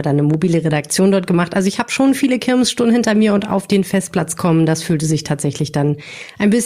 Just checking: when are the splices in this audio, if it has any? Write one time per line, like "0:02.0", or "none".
none